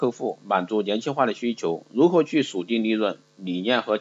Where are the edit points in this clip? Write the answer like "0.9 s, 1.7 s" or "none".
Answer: none